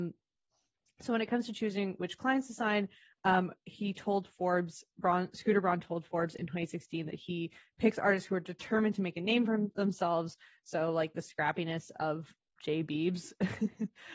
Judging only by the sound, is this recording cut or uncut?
uncut